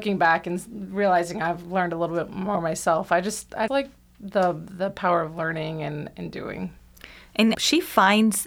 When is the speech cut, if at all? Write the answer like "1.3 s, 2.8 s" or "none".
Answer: 3.7 s, 7.5 s